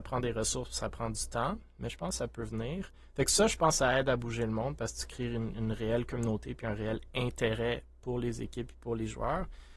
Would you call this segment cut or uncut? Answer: uncut